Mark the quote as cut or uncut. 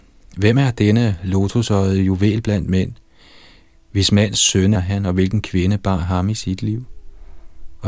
cut